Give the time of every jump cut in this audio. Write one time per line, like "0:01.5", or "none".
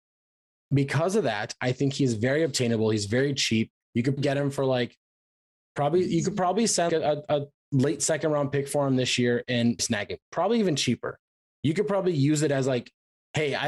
0:04.2
0:06.9
0:09.8

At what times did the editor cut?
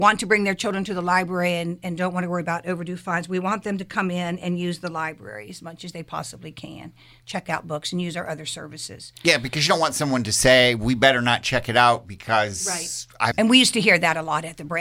0:13.3

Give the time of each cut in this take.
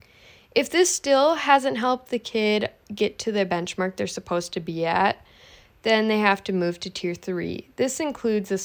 none

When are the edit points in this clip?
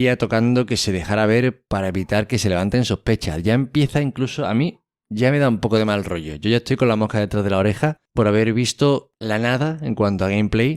none

